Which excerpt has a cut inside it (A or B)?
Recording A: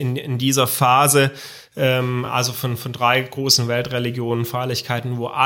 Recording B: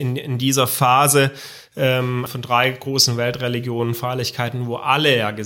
B